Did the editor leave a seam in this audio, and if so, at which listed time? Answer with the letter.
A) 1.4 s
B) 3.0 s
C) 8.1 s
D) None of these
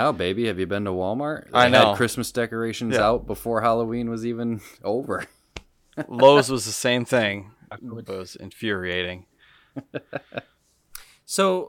C